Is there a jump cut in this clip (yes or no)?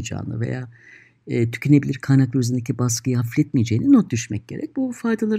no